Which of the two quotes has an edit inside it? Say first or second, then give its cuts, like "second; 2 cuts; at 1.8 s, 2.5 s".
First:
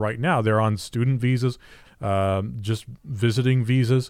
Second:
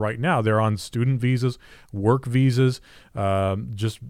first; 1 cut; at 1.8 s